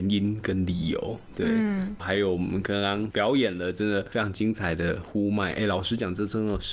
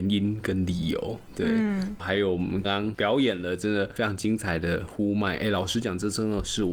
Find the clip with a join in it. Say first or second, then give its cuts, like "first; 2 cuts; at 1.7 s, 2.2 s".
second; 1 cut; at 2.6 s